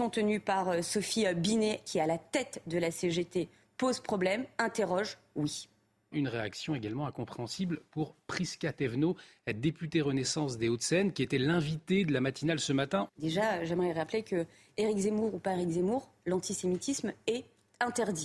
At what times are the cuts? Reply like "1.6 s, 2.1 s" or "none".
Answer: 6.1 s, 13.1 s, 16.2 s